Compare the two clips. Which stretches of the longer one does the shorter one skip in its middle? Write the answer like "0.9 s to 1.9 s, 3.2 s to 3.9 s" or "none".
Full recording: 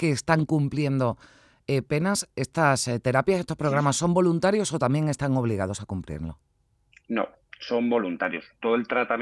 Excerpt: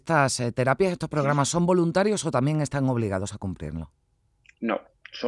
none